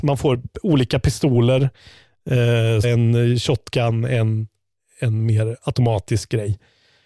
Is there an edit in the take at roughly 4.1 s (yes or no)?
no